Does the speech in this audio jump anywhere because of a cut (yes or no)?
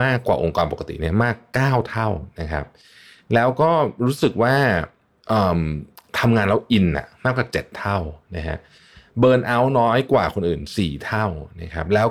no